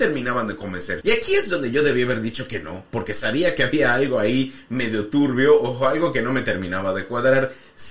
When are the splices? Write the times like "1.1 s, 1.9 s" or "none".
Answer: 1.0 s